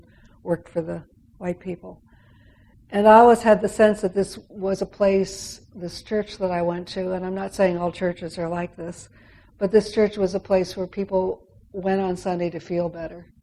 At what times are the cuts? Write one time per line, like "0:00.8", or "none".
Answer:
none